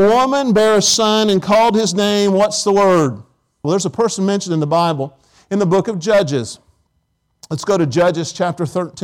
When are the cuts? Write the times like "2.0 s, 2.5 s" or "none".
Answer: 3.6 s